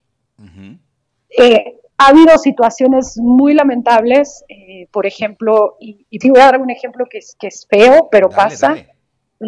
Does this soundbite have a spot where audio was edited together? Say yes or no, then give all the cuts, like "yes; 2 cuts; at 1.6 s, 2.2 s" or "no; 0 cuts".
yes; 1 cut; at 6.2 s